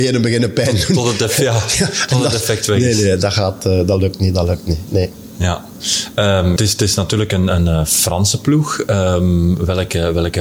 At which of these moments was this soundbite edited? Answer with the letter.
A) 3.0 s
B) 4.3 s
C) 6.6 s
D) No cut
C